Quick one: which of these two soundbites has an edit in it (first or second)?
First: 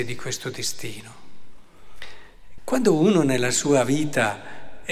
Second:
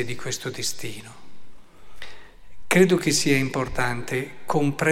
first